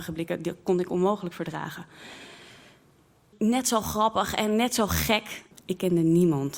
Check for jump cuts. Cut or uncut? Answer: cut